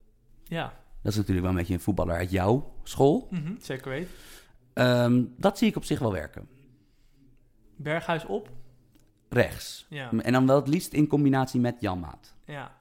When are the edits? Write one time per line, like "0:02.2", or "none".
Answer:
none